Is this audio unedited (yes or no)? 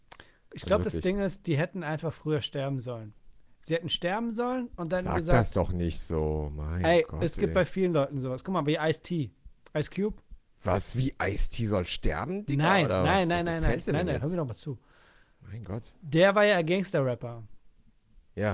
yes